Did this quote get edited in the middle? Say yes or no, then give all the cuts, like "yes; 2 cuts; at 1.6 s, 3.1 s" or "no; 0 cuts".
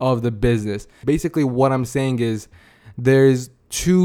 yes; 1 cut; at 1.0 s